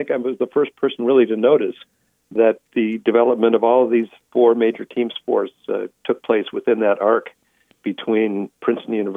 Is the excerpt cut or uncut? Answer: cut